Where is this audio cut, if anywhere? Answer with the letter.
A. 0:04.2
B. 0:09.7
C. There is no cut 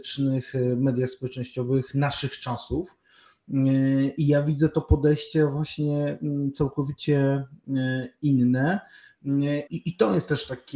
B